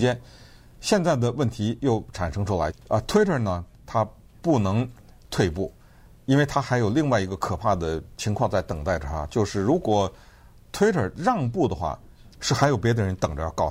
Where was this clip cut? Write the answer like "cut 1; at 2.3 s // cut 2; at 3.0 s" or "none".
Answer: cut 1; at 2.7 s // cut 2; at 12.3 s